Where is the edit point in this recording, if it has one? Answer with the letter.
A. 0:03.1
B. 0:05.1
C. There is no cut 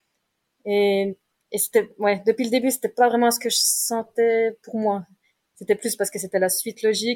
C